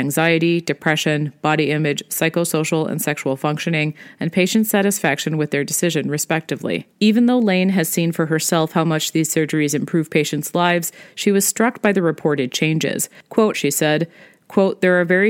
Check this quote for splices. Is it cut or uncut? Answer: cut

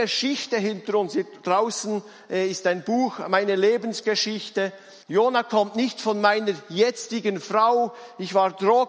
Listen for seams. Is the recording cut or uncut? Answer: cut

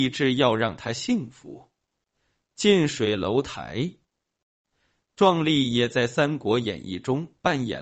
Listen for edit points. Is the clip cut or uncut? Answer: uncut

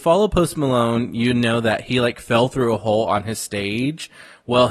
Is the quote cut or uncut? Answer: uncut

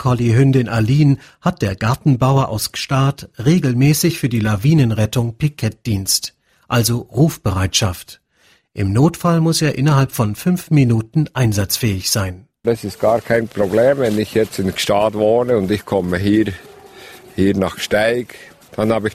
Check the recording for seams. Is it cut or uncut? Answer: uncut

